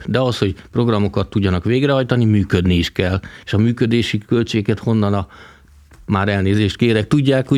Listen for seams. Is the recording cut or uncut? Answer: uncut